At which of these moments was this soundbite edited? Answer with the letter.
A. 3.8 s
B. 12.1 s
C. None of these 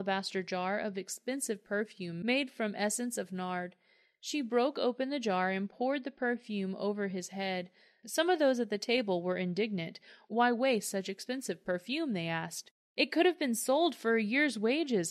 C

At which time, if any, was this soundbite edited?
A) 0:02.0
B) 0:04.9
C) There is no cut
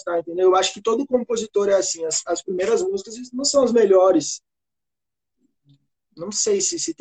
C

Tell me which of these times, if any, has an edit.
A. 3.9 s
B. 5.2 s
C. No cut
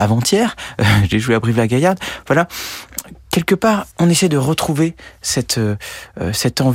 A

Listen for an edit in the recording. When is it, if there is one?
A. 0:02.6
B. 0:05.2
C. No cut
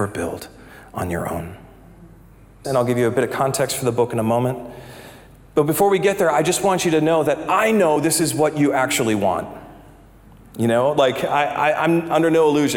A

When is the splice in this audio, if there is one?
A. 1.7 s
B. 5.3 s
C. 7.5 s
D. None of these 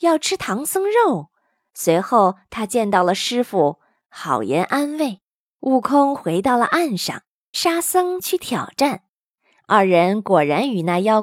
C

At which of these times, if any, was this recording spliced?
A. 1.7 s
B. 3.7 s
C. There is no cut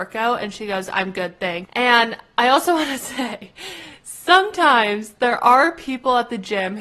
A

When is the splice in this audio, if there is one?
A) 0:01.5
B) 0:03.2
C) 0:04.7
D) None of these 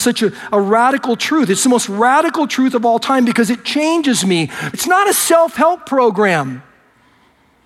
C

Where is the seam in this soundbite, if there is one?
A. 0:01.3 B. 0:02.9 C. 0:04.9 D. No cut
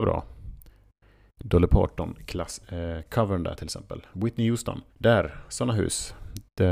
C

